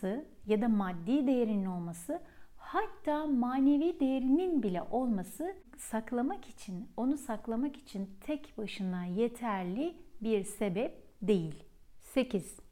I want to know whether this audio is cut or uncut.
uncut